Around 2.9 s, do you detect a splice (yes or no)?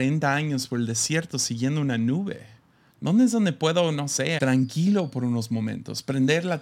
yes